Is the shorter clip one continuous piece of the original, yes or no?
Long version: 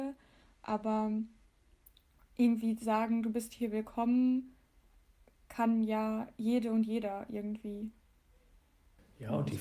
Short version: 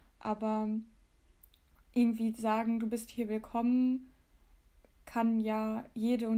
yes